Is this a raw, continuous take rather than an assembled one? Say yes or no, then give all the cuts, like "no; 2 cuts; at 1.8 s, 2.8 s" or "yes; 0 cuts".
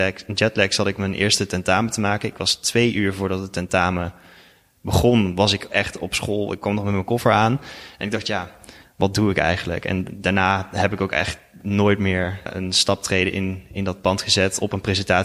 no; 1 cut; at 12.5 s